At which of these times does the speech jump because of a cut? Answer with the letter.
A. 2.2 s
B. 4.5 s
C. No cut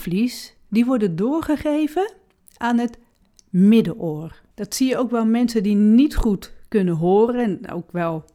B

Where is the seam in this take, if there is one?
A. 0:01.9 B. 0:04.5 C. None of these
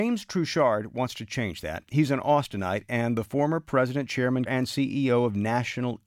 B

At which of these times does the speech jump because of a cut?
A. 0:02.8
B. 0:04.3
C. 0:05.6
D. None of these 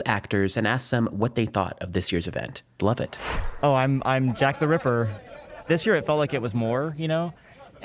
A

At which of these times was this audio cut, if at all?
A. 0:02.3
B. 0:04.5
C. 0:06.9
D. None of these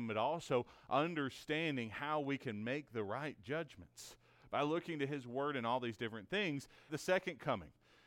C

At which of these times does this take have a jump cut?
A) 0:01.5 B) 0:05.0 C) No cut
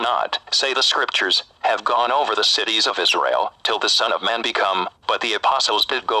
B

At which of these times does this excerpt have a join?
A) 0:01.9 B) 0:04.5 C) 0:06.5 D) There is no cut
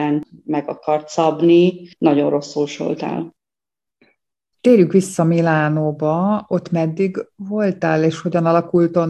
A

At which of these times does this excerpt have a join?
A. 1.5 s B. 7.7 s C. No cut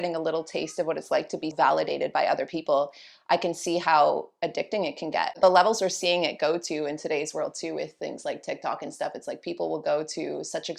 A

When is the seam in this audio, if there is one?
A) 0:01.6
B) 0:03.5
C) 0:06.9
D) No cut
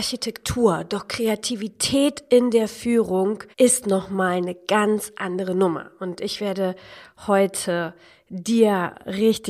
B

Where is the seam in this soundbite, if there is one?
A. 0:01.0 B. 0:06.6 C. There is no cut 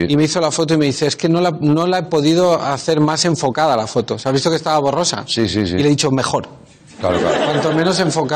C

